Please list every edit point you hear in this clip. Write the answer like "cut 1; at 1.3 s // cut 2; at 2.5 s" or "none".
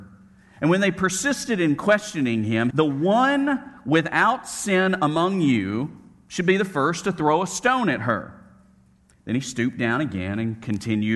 cut 1; at 2.7 s